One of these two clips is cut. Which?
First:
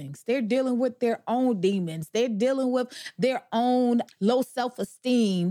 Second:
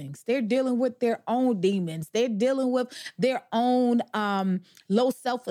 first; 1 cut; at 4.1 s

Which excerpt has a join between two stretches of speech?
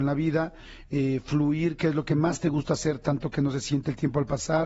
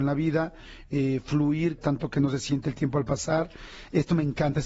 second; 1 cut; at 1.8 s

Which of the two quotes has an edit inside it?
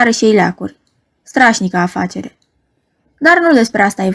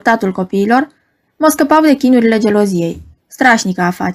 second; 1 cut; at 3.2 s

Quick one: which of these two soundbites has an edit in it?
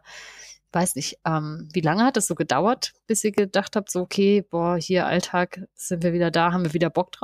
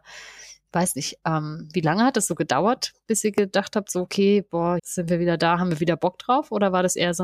second; 1 cut; at 4.8 s

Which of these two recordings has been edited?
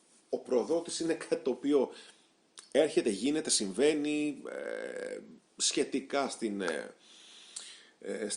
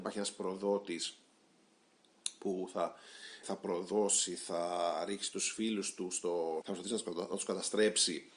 second; 2 cuts; at 3.4 s, 6.6 s

